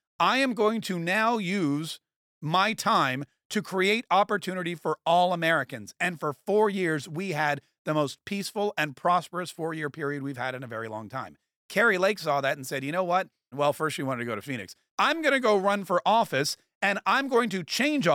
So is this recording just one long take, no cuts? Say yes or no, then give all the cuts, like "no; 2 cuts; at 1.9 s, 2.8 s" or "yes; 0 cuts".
no; 2 cuts; at 13.5 s, 14.9 s